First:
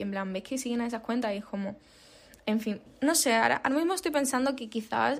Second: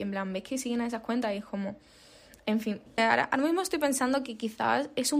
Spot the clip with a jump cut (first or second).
second